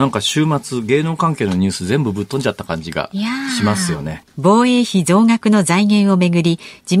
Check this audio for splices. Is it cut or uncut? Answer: cut